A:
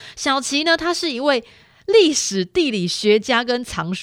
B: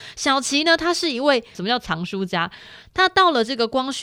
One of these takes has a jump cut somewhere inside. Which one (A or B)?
B